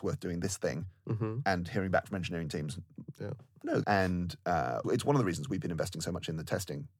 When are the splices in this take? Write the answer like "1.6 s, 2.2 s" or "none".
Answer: 3.8 s, 4.8 s